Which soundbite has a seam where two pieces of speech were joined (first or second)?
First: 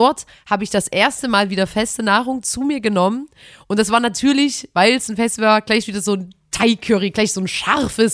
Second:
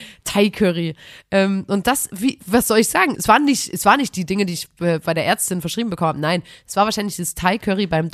second